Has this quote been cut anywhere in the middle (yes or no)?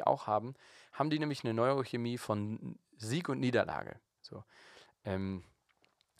no